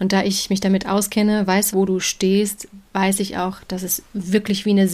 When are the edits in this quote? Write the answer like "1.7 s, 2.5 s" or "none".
1.7 s